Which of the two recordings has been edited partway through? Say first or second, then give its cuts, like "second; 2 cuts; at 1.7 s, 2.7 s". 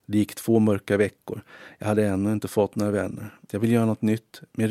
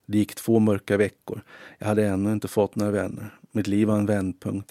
first; 1 cut; at 3.5 s